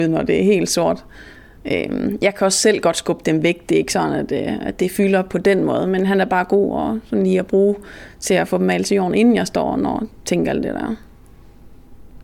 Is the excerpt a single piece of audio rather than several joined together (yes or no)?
yes